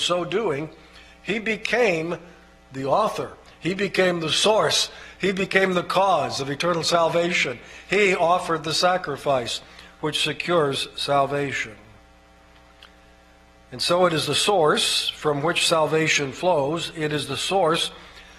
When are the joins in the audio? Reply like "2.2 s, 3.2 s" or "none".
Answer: none

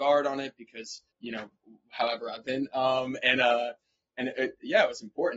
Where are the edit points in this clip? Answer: 1.1 s

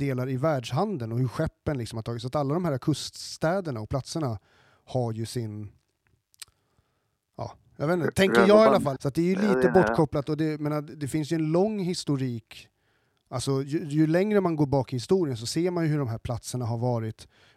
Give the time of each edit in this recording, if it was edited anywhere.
9.0 s

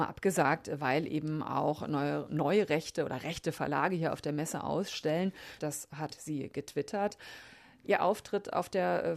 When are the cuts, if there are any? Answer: 5.6 s, 7.8 s

